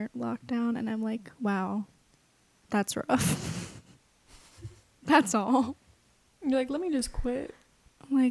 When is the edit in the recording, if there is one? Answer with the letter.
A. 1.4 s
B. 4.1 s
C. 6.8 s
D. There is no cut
D